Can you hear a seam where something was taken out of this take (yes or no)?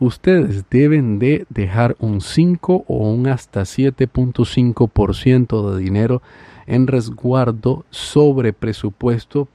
no